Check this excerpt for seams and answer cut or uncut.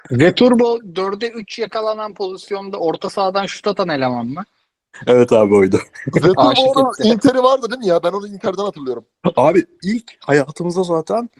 uncut